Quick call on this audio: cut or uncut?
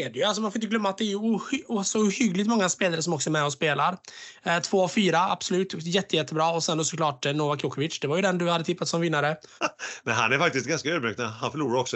cut